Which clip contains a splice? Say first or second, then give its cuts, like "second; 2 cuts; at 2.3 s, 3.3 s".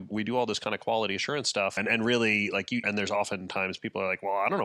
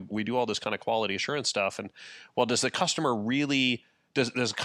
first; 2 cuts; at 1.8 s, 2.8 s